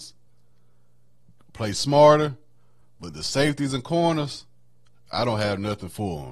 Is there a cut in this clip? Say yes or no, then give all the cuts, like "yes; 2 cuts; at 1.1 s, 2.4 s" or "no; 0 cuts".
no; 0 cuts